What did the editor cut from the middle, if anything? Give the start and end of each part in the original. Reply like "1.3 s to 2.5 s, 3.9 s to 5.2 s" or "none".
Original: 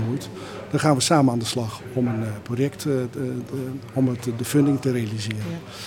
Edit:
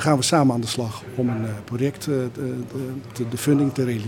3.9 s to 4.2 s